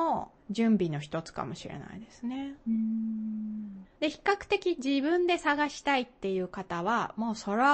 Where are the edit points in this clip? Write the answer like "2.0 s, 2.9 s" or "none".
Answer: 3.9 s